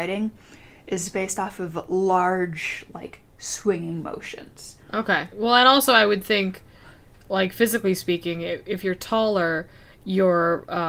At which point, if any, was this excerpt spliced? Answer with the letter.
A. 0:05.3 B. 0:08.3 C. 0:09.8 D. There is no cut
A